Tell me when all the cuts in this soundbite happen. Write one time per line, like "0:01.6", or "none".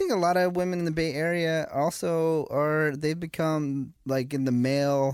0:04.0